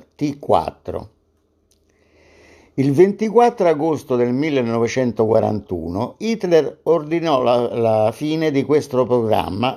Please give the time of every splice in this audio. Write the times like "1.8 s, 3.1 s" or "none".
none